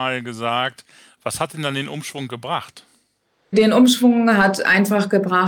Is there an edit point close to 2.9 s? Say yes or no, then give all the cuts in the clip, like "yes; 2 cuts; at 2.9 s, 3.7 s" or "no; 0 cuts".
no; 0 cuts